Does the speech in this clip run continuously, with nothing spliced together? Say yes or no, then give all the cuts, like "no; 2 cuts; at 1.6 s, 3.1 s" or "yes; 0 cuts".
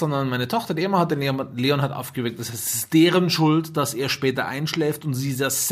yes; 0 cuts